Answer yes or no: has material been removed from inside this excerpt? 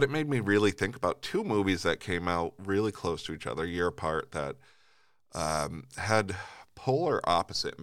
no